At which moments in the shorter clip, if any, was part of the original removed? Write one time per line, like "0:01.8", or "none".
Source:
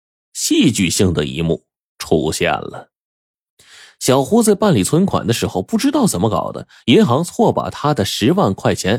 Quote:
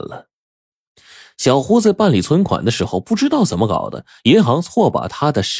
none

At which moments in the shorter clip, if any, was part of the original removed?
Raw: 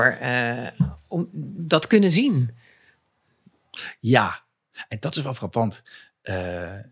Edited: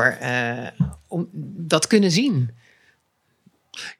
none

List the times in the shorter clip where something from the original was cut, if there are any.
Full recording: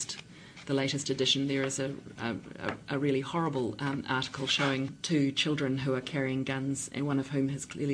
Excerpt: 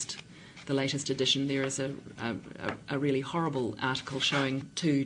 0:03.8

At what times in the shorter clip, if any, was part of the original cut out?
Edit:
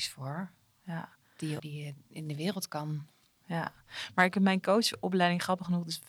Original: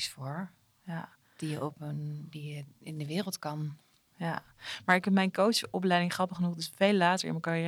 0:01.6

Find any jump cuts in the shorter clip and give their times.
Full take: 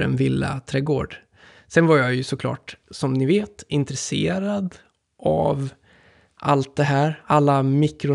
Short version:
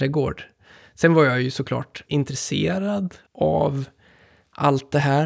0:02.1
0:03.3

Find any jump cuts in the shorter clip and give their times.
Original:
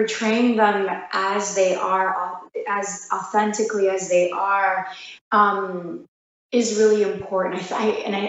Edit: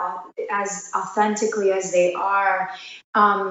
none

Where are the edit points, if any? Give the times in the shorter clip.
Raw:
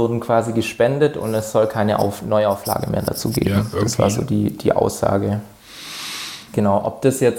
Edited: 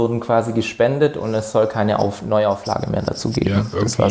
none

